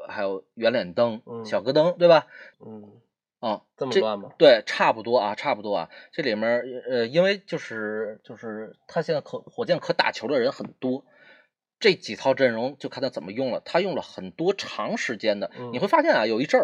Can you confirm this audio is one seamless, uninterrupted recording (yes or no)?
no